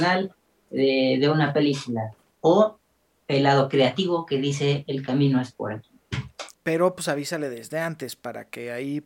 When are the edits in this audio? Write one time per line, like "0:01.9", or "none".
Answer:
0:02.3
0:06.5